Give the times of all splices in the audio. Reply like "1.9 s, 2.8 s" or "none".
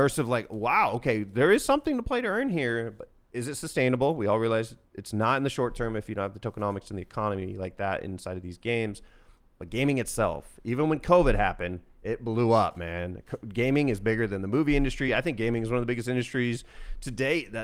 none